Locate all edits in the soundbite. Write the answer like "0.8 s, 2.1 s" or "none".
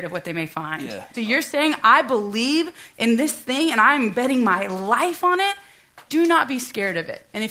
1.1 s, 6.1 s